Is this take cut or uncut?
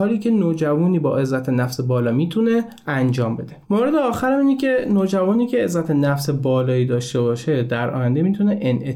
cut